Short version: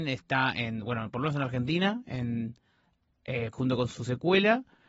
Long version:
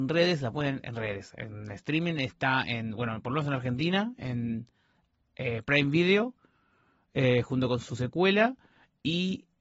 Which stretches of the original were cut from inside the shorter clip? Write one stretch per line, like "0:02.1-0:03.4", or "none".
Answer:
0:05.6-0:07.4